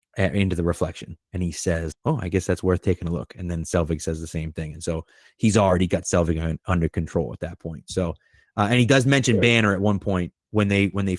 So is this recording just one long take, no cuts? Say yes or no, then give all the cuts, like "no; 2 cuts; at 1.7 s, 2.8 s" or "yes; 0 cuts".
no; 1 cut; at 1.9 s